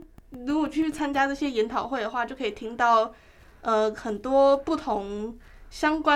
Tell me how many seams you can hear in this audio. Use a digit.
0